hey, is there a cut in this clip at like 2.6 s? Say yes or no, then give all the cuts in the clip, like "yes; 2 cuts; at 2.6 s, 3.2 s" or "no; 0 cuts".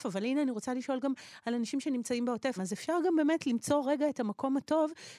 yes; 1 cut; at 2.6 s